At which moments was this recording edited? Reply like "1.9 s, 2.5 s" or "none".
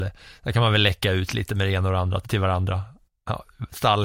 2.2 s